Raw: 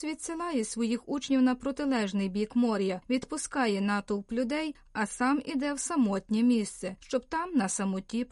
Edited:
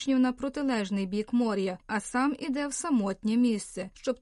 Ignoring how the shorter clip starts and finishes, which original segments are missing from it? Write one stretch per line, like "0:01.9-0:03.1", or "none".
0:03.0-0:04.9